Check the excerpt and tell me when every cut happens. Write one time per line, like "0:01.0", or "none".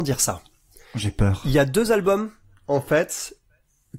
none